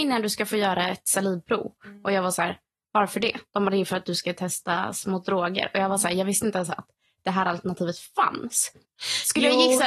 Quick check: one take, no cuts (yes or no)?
no